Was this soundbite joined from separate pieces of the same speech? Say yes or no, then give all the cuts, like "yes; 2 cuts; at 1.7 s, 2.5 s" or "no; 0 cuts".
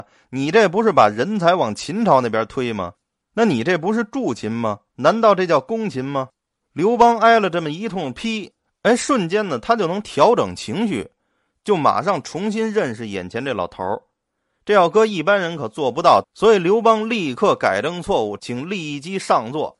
yes; 2 cuts; at 16.2 s, 18.4 s